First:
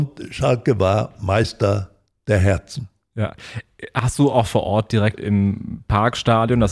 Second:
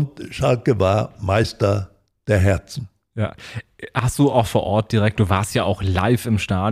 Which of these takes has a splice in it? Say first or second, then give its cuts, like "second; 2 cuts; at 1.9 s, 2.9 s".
first; 1 cut; at 5.1 s